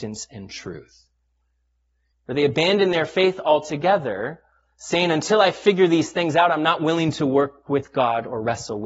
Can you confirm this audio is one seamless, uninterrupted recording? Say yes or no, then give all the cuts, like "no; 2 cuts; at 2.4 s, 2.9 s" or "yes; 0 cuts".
no; 1 cut; at 2.1 s